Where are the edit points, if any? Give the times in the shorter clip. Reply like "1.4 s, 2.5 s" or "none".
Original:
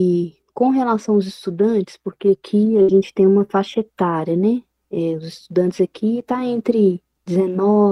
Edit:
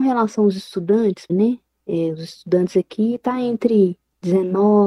1.3 s